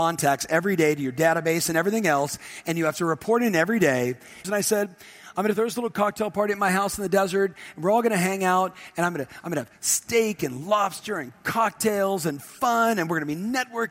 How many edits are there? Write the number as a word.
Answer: one